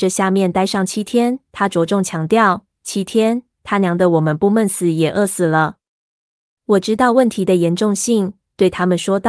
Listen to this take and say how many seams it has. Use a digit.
0